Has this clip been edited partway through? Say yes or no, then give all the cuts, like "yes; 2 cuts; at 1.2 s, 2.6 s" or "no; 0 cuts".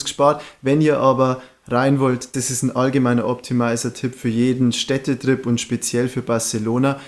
yes; 1 cut; at 2.3 s